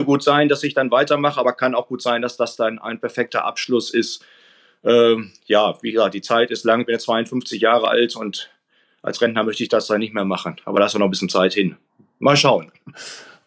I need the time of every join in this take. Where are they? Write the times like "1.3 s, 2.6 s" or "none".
none